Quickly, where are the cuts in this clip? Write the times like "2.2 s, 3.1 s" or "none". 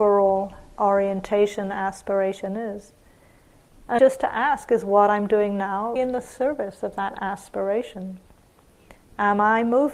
4.0 s, 6.0 s